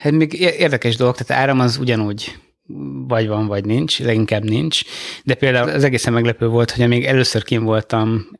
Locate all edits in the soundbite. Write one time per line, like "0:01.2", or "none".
0:05.6